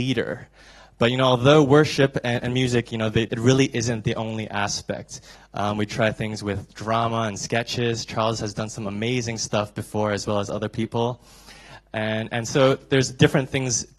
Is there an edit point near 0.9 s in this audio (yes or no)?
no